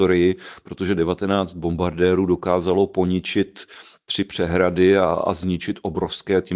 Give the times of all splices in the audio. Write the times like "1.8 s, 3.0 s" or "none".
none